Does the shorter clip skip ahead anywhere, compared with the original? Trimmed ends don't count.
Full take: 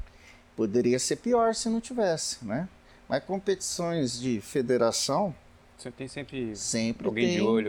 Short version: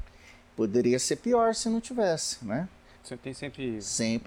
yes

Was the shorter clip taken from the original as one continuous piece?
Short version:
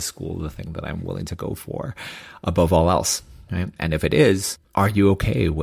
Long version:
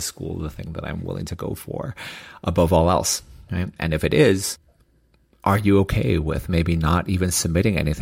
no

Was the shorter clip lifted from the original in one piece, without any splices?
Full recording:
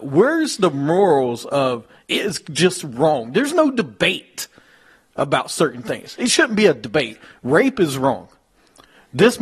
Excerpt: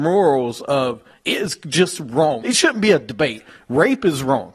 no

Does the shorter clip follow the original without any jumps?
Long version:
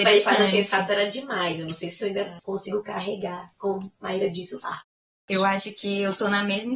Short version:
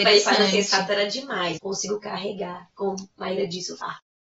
no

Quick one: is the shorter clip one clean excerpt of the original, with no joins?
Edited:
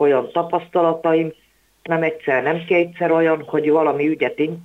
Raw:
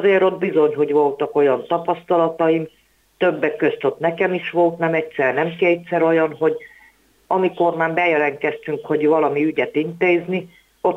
no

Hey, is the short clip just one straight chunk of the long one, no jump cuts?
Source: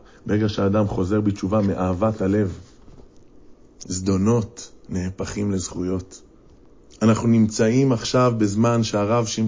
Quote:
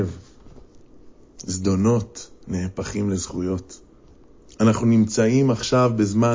yes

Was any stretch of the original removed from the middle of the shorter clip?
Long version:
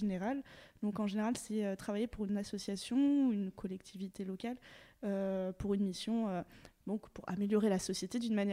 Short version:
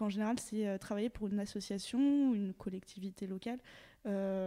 no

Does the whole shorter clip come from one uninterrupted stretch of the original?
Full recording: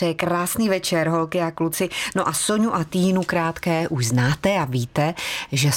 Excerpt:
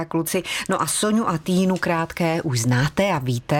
yes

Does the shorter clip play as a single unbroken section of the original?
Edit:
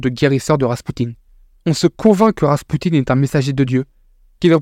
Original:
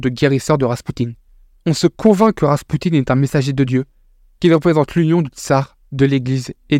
yes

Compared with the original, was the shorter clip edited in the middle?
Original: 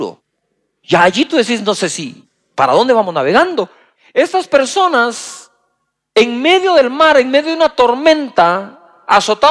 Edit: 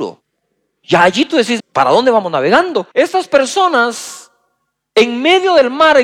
yes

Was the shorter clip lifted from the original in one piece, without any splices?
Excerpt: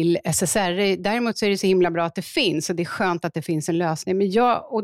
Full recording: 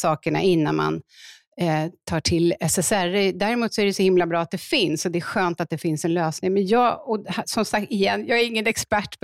yes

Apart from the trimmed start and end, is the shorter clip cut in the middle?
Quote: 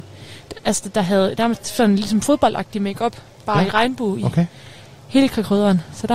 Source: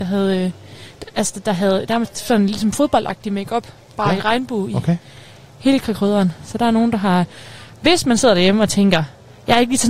no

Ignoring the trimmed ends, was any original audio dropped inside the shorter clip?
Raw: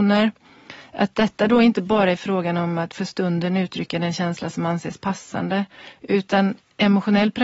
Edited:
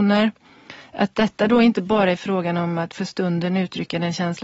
no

